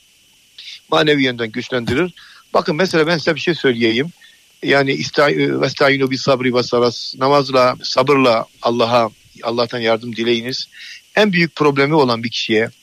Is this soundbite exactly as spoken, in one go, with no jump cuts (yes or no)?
no